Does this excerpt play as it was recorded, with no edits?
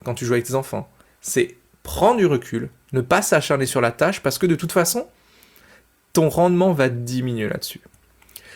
no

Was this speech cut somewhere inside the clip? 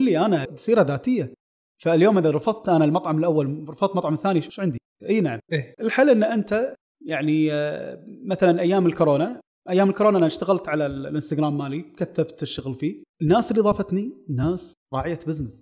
yes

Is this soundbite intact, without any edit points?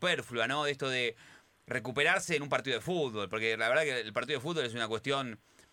yes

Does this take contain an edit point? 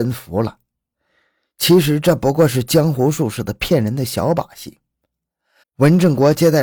yes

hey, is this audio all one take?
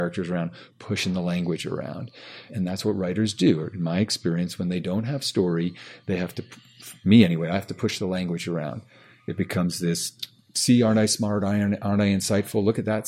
no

